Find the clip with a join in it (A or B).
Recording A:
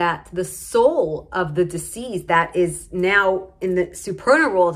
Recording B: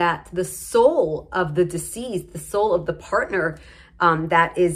A